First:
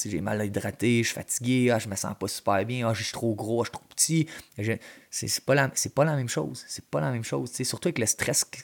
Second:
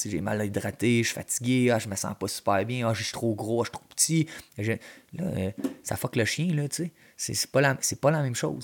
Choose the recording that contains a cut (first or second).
first